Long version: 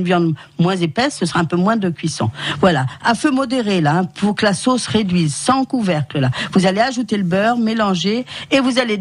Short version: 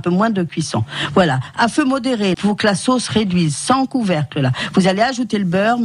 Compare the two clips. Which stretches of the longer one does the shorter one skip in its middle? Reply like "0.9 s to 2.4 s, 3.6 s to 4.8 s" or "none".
3.8 s to 4.1 s